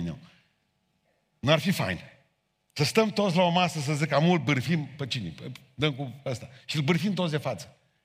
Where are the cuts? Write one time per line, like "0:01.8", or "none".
none